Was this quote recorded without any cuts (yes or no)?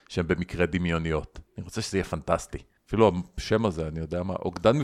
no